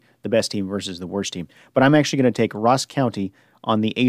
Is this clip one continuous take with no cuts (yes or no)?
yes